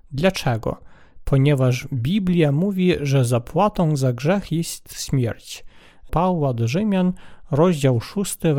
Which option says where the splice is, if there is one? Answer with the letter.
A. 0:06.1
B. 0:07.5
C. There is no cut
A